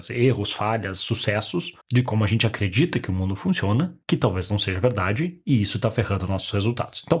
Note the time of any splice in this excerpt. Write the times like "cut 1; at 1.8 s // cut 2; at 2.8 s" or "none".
cut 1; at 1.8 s // cut 2; at 4.0 s